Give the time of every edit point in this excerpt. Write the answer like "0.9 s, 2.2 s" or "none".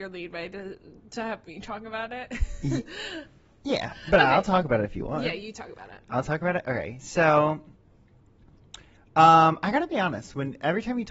none